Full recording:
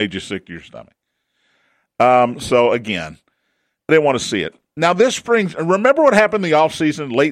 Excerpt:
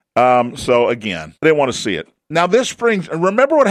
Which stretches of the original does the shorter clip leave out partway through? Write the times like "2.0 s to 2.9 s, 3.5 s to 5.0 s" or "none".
3.2 s to 3.8 s